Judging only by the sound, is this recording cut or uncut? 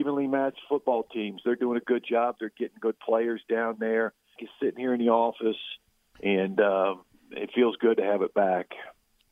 cut